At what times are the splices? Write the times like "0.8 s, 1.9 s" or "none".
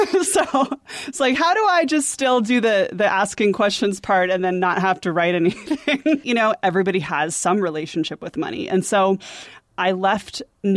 6.2 s